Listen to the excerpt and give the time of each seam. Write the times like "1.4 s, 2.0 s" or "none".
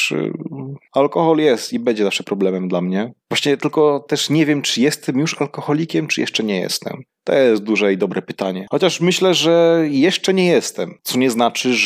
none

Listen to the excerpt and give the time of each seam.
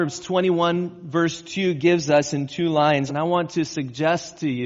3.1 s

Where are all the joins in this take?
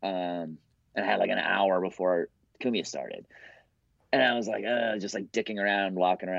none

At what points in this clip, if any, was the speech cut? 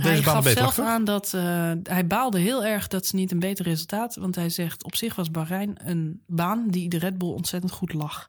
none

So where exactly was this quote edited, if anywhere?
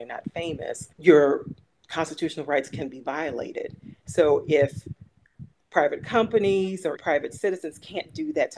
0.9 s, 4.0 s, 7.0 s

